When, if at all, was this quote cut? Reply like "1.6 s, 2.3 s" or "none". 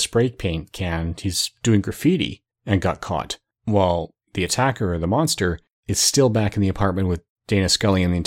none